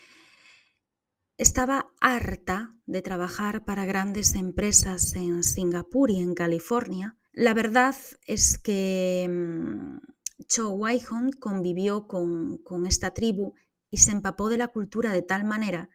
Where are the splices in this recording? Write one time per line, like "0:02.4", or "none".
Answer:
0:07.3